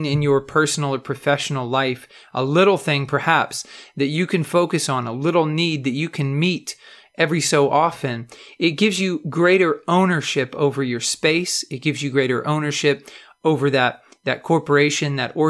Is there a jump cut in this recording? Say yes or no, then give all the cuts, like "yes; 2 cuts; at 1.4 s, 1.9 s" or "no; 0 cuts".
no; 0 cuts